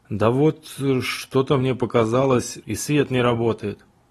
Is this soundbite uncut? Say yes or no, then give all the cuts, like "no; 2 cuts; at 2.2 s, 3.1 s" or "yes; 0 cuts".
no; 1 cut; at 2.6 s